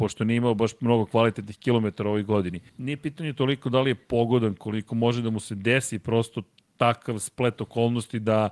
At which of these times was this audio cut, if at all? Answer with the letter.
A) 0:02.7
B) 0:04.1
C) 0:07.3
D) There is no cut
A